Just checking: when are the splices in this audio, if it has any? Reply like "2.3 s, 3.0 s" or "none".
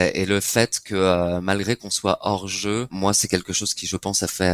none